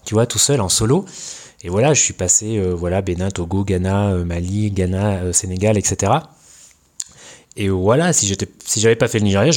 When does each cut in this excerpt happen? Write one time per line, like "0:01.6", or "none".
none